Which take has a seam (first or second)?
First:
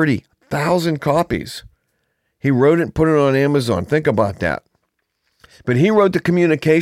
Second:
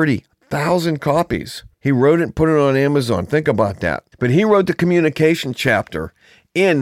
second